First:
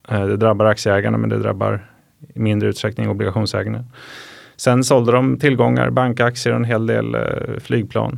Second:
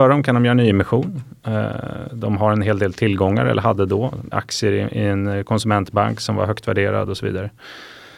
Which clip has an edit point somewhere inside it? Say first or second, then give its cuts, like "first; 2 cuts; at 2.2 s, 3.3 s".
second; 1 cut; at 4.3 s